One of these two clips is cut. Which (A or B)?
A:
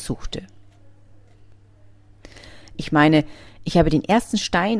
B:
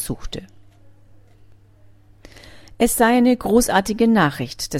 A